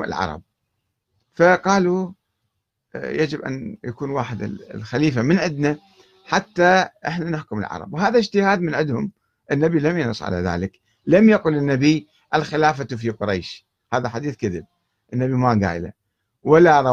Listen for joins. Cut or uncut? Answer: uncut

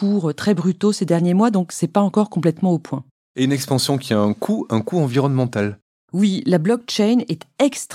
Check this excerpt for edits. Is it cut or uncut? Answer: cut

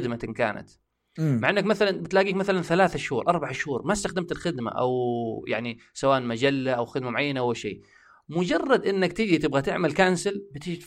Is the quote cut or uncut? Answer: uncut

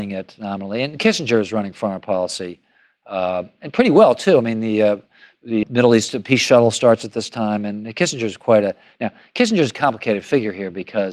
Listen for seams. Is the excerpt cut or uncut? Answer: cut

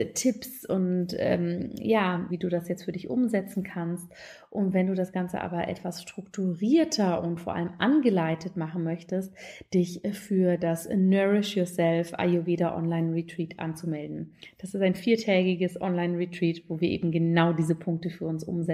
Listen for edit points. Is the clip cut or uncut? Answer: cut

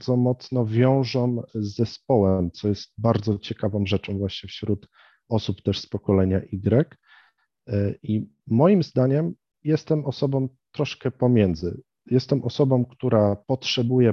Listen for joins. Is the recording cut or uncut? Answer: uncut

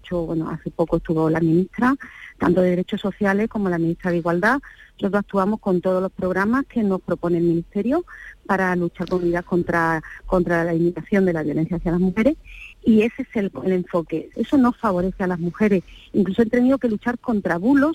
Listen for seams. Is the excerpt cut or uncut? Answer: cut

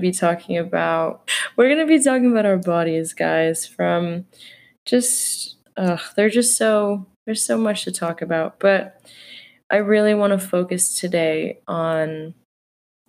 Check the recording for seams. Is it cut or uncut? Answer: cut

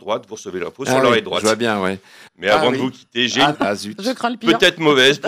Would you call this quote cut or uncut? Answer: cut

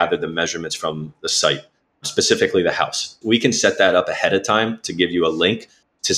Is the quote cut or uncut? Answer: cut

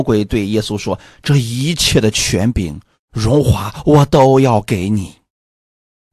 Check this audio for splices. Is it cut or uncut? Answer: uncut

